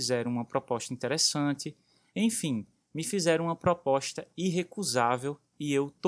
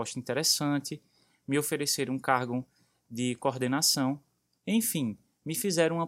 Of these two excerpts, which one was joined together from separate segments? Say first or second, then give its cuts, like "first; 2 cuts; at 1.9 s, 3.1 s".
first; 1 cut; at 2.1 s